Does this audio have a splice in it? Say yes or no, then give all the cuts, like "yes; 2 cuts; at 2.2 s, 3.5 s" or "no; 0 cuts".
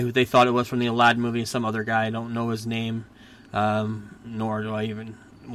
no; 0 cuts